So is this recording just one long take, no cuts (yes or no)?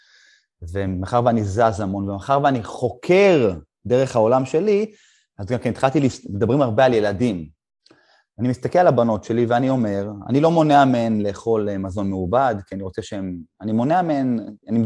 yes